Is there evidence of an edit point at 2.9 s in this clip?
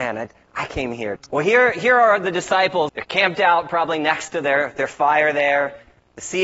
yes; 2 cuts; at 1.2 s, 2.9 s

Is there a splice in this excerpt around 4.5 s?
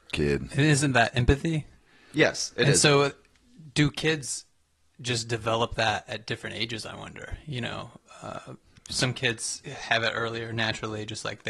no; 0 cuts

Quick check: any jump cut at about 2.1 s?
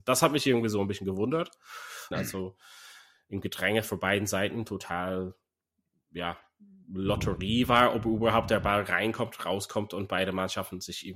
yes; 1 cut; at 2.1 s

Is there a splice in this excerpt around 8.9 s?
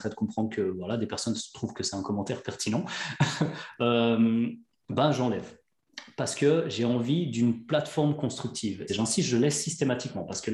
yes; 1 cut; at 8.9 s

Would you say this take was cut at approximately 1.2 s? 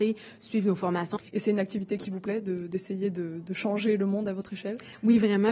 yes; 1 cut; at 1.2 s

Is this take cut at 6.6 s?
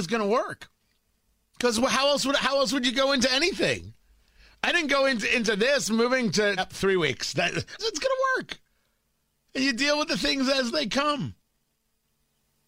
yes; 2 cuts; at 6.6 s, 7.8 s

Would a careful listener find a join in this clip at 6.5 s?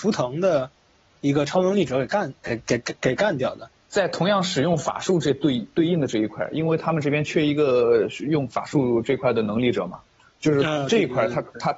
no; 1 cut; at 3.8 s

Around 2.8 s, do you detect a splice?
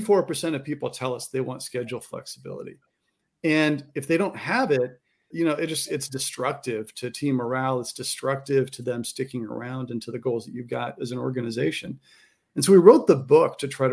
no; 1 cut; at 5.3 s

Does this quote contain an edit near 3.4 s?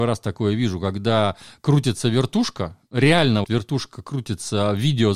yes; 1 cut; at 3.4 s

